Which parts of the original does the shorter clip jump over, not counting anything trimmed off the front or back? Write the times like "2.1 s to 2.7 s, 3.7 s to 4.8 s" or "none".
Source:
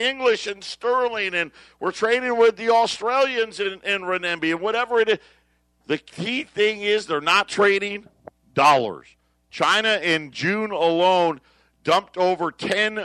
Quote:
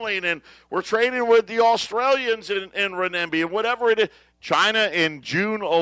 5.4 s to 9.4 s